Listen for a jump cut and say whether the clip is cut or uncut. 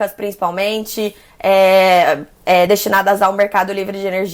uncut